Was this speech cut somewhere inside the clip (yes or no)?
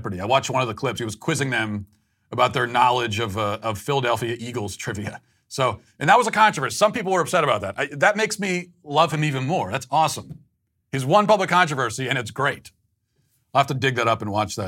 no